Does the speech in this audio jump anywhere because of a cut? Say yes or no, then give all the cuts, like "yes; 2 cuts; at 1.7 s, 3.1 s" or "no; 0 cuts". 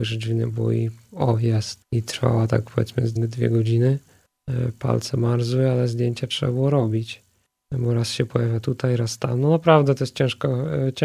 yes; 2 cuts; at 1.8 s, 3.2 s